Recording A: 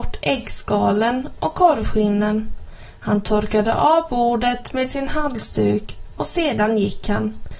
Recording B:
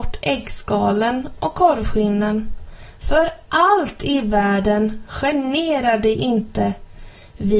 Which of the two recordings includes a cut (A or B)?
B